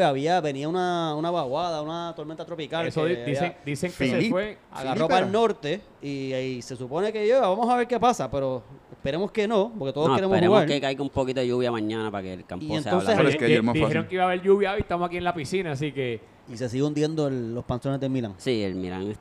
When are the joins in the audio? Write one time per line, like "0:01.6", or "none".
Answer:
0:13.2
0:16.4